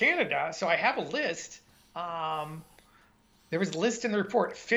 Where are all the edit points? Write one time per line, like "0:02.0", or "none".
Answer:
none